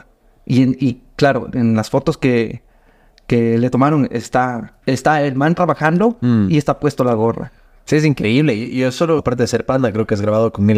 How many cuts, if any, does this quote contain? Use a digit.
2